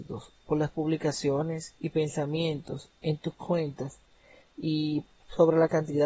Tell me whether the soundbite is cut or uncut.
uncut